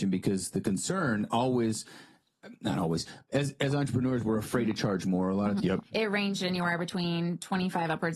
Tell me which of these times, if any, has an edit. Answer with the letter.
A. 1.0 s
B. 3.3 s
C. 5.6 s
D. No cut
C